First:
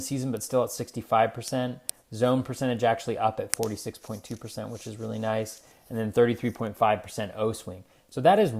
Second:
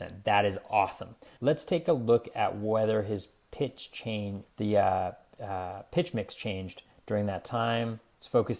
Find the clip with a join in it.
second; 2 cuts; at 1.4 s, 4.5 s

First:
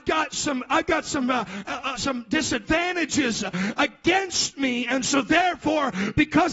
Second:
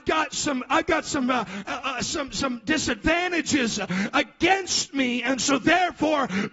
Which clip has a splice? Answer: first; 1 cut; at 1.9 s

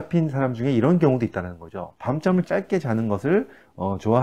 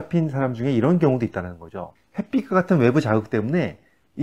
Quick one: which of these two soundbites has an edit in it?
second; 1 cut; at 2.0 s

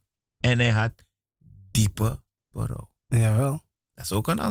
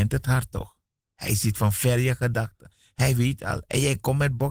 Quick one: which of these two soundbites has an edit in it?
first; 1 cut; at 3.0 s

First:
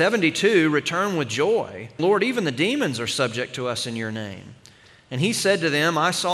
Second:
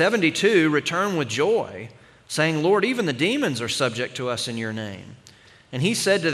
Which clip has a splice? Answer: first; 1 cut; at 2.0 s

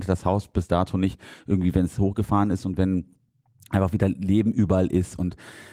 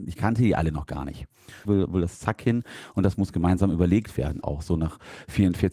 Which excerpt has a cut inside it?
second; 2 cuts; at 1.6 s, 4.4 s

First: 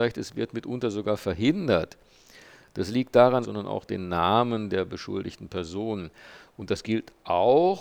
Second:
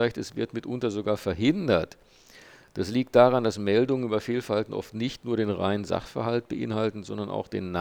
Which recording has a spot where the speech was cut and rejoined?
first; 2 cuts; at 3.4 s, 6.5 s

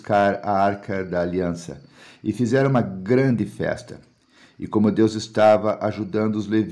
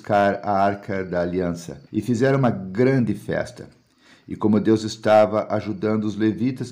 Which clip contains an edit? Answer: second; 1 cut; at 1.9 s

